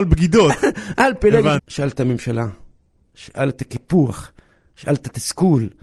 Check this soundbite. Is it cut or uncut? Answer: cut